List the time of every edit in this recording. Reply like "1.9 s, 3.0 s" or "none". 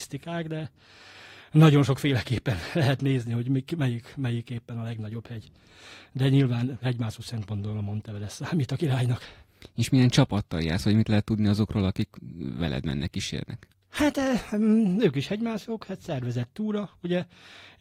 none